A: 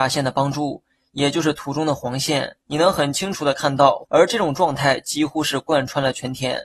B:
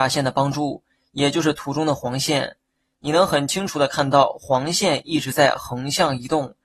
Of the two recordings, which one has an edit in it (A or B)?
A